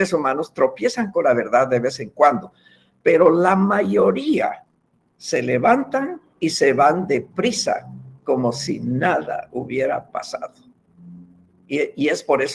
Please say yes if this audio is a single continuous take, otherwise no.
no